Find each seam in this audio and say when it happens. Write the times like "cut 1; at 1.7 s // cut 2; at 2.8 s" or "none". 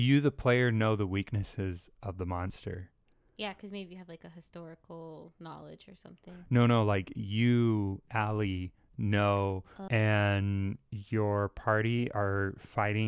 cut 1; at 9.9 s